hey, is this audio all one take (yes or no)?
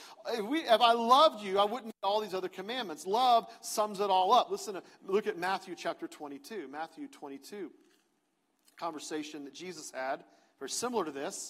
yes